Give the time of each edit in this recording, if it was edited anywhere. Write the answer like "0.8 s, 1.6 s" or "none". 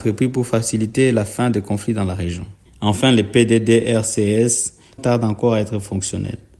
2.7 s, 5.0 s